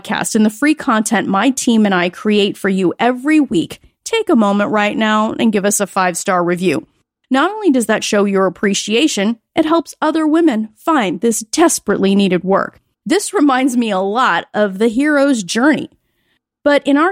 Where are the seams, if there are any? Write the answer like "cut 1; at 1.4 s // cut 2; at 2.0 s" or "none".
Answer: cut 1; at 12.9 s

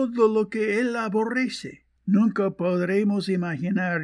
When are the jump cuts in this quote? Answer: cut 1; at 2.0 s

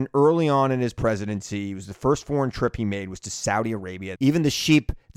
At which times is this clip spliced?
cut 1; at 4.2 s

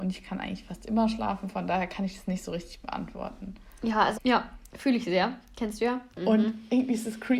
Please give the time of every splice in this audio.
cut 1; at 4.1 s // cut 2; at 6.1 s

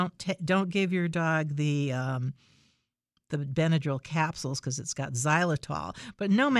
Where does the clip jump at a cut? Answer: none

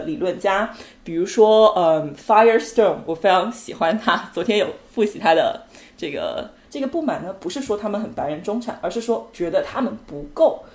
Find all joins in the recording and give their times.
cut 1; at 6.6 s

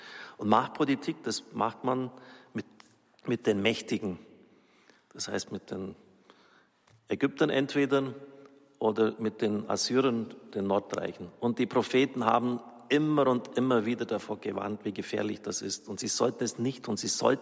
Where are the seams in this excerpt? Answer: none

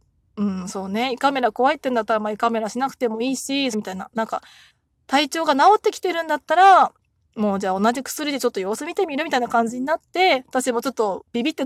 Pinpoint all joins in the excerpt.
cut 1; at 3.7 s

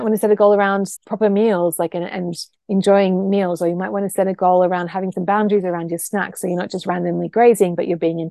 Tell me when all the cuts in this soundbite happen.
cut 1; at 1.0 s

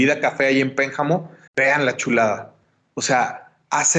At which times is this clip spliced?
cut 1; at 1.5 s

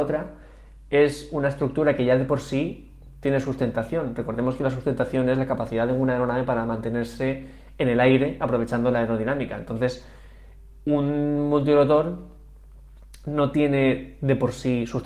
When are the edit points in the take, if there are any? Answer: none

